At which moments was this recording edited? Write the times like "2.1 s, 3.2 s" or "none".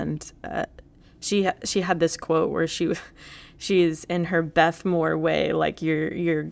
none